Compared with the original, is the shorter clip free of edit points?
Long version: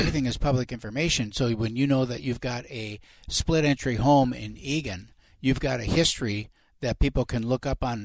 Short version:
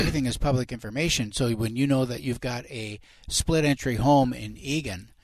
yes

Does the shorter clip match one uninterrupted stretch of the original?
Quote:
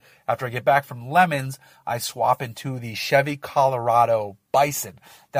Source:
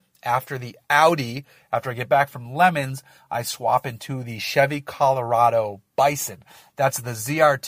yes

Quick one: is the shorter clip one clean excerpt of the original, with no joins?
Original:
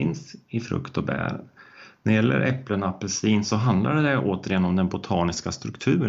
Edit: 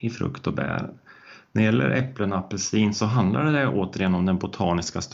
yes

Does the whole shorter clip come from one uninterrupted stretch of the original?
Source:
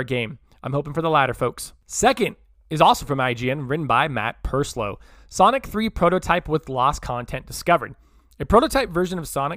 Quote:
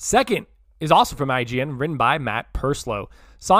yes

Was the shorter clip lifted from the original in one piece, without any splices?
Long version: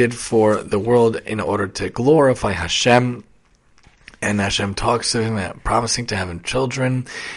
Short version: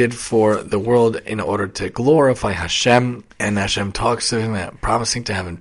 no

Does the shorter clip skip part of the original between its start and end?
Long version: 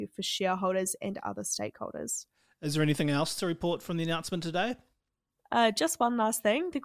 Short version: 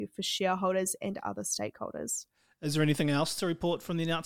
no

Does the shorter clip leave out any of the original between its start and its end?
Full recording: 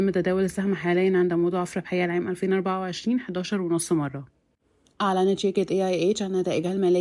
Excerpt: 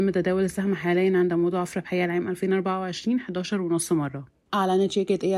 yes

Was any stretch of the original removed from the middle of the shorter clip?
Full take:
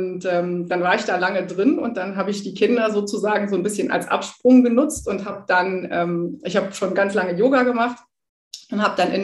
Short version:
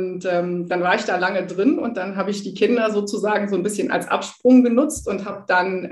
no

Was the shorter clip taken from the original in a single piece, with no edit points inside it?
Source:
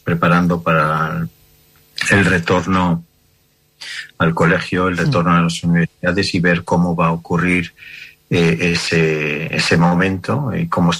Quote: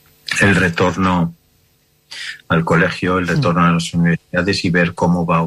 yes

